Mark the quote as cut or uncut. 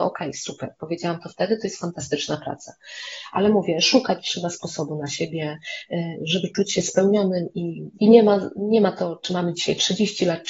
cut